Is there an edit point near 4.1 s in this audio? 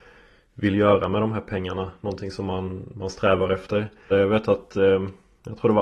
yes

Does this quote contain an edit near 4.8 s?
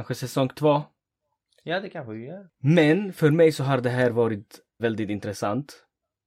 yes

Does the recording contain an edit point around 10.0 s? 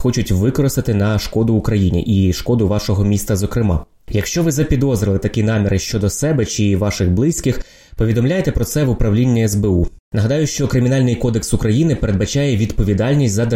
yes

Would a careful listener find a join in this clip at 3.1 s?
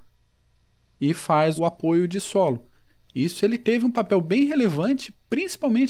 no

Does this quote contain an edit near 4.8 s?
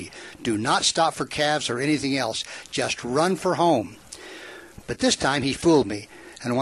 yes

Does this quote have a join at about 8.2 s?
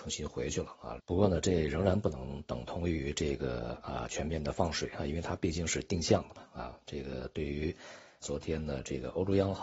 yes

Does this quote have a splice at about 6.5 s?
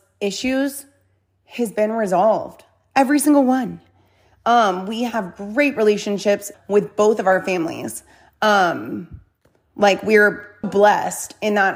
yes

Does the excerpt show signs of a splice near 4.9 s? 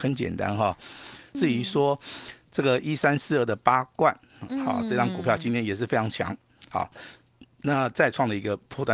no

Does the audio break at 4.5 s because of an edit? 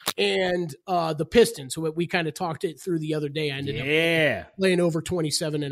no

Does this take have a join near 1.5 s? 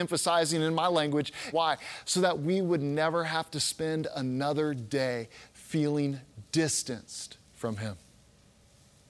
yes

